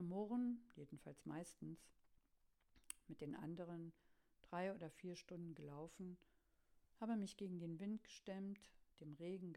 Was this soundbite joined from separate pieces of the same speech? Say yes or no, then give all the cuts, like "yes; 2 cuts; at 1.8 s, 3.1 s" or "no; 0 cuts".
no; 0 cuts